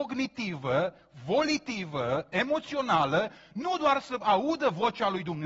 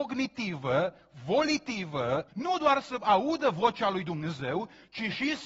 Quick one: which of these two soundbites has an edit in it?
second; 1 cut; at 2.3 s

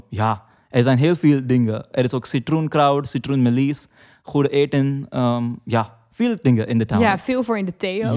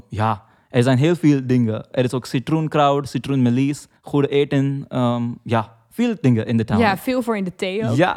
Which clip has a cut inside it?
second; 1 cut; at 4.0 s

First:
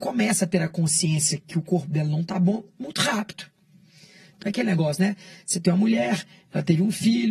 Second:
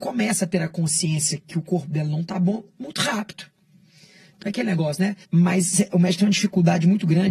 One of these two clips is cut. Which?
second; 1 cut; at 5.2 s

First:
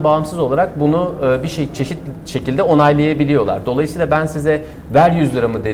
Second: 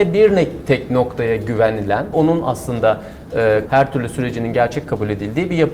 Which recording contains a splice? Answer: second; 2 cuts; at 2.1 s, 3.7 s

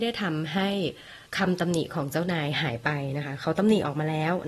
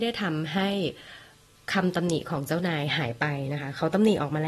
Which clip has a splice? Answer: first; 1 cut; at 1.3 s

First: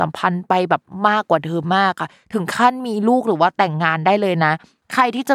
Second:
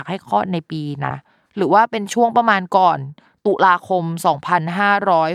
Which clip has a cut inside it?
second; 1 cut; at 1.1 s

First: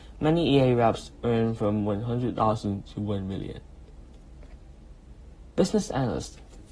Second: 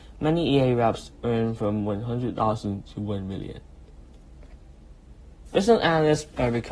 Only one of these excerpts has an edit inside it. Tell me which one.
second; 1 cut; at 5.5 s

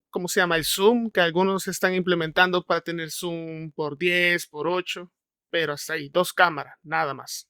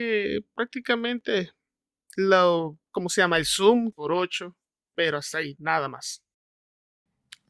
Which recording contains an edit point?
second; 2 cuts; at 3.9 s, 5.5 s

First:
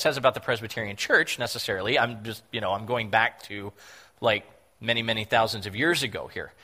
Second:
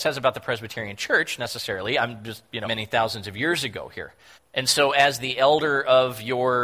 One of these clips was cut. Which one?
second; 2 cuts; at 2.6 s, 4.4 s

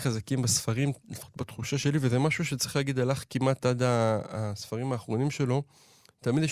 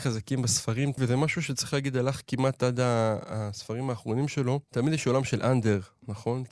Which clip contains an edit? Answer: second; 2 cuts; at 1.0 s, 4.6 s

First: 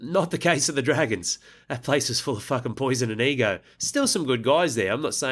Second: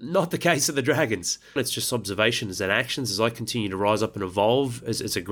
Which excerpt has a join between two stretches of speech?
second; 1 cut; at 1.6 s

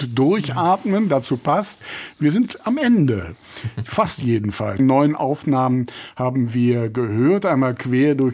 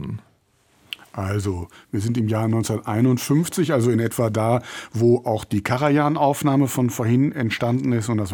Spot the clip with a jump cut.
first; 1 cut; at 4.8 s

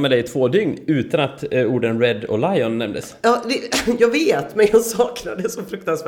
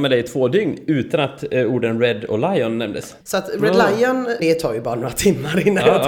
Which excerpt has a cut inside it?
second; 2 cuts; at 3.2 s, 4.4 s

